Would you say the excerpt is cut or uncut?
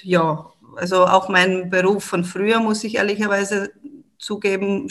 uncut